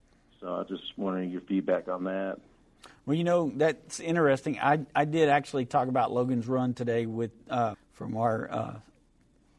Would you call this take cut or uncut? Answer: cut